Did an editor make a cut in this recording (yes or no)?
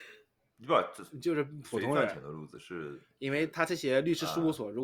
no